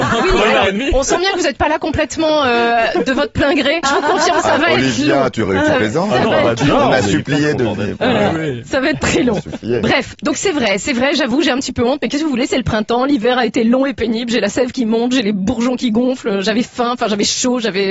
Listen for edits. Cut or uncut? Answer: cut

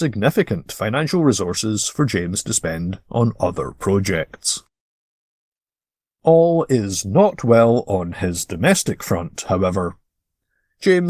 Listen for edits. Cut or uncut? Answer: uncut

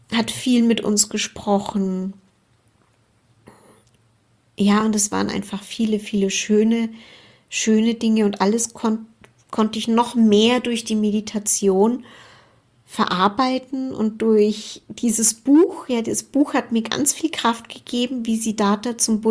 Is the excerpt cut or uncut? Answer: uncut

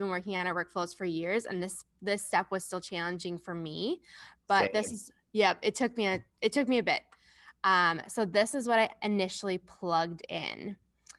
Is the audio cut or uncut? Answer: uncut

